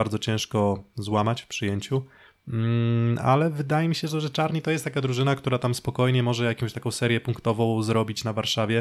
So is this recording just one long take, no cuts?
no; 1 cut; at 2.3 s

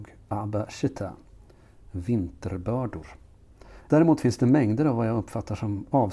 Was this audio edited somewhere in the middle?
yes; 1 cut; at 3.9 s

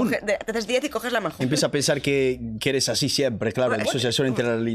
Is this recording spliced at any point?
yes; 2 cuts; at 1.4 s, 3.8 s

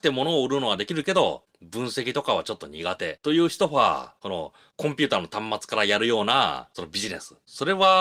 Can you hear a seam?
no; 0 cuts

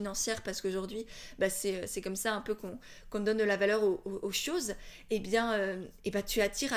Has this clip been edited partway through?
no; 0 cuts

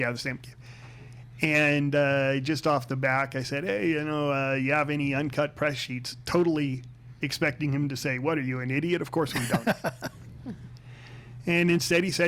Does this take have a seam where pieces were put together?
no; 0 cuts

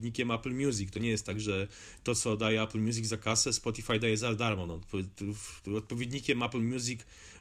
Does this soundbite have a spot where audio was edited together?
no; 0 cuts

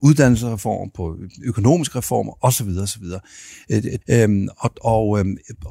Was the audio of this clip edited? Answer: yes; 1 cut; at 4.0 s

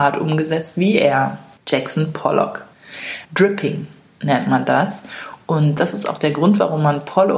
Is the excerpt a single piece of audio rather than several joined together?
no; 1 cut; at 3.2 s

